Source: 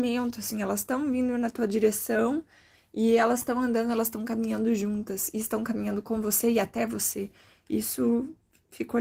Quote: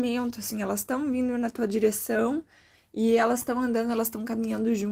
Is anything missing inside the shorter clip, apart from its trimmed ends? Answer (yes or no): no